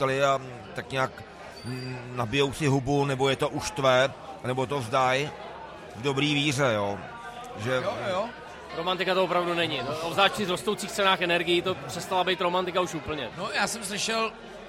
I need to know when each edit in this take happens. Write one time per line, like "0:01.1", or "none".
0:08.7
0:13.3

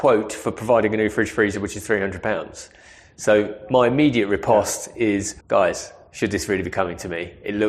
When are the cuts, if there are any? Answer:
0:05.4

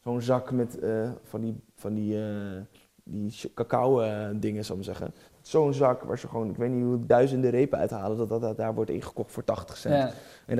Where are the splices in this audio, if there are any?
none

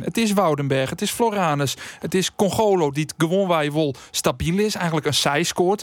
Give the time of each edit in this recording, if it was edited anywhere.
none

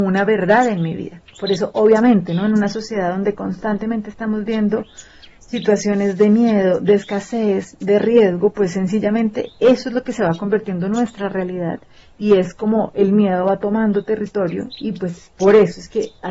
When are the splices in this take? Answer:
0:01.3

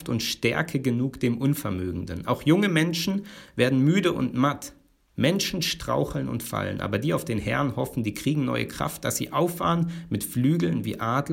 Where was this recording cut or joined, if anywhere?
none

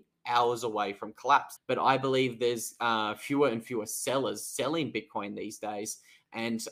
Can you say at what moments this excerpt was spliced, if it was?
0:01.6

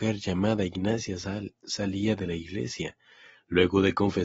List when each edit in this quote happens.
none

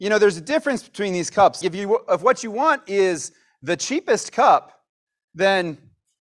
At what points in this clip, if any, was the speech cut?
0:01.6

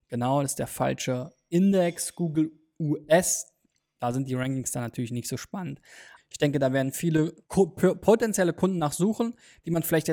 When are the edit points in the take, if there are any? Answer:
0:06.2
0:07.4

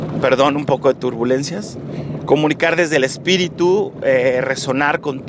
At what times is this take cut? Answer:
none

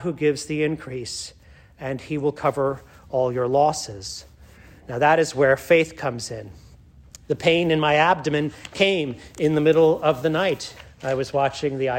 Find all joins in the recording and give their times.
0:07.2
0:10.8

